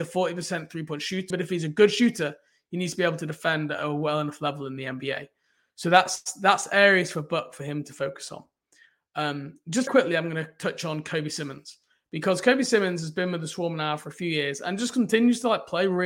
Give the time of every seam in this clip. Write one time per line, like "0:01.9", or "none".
0:01.3
0:09.9